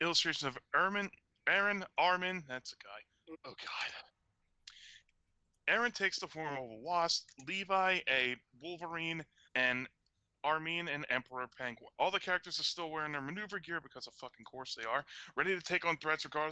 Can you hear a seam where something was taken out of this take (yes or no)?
yes